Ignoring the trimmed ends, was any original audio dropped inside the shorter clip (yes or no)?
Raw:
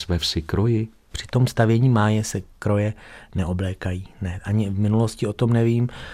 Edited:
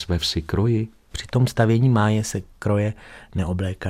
no